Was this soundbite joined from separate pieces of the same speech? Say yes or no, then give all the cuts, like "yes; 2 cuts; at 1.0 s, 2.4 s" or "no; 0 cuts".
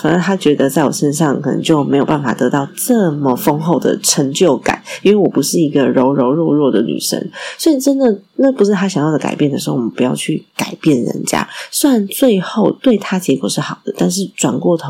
no; 0 cuts